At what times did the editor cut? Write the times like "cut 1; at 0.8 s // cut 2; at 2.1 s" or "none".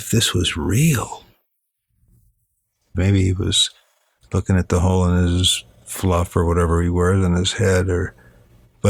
cut 1; at 2.9 s